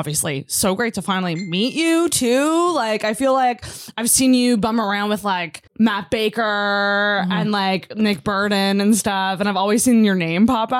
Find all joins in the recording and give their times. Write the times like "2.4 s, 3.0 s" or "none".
5.7 s